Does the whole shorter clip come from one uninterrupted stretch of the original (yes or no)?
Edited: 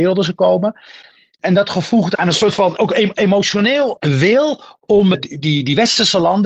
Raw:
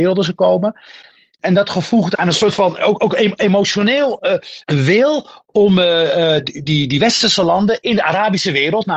no